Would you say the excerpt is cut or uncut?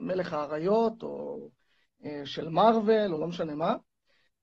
uncut